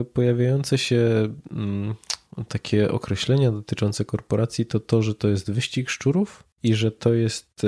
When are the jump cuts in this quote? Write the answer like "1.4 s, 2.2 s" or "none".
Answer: 6.5 s